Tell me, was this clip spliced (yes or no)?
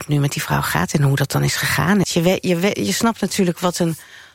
yes